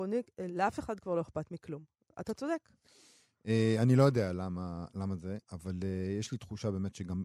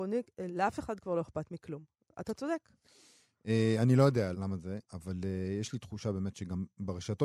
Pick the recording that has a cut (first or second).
second